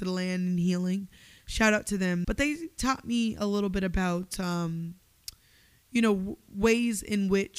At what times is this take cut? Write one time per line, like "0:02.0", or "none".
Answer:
0:02.2